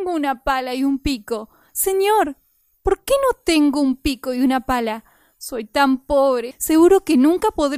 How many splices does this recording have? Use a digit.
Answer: 1